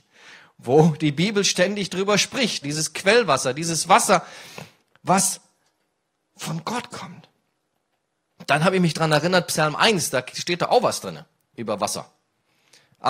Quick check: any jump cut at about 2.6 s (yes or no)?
yes